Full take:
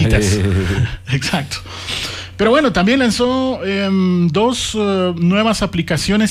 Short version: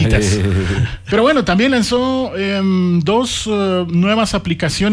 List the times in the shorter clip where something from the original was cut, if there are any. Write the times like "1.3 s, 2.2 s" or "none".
1.1 s